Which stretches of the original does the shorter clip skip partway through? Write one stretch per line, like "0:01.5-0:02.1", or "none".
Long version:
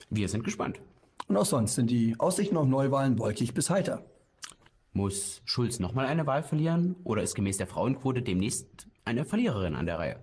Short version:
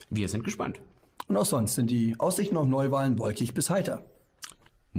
none